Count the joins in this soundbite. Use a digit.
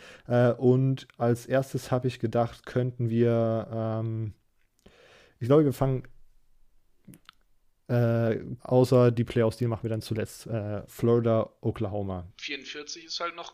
3